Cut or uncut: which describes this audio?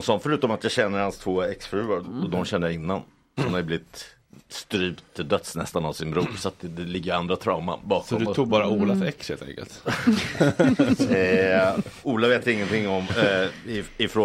cut